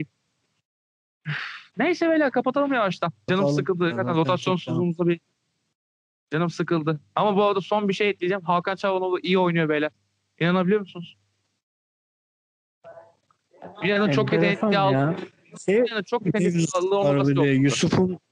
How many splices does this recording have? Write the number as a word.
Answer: one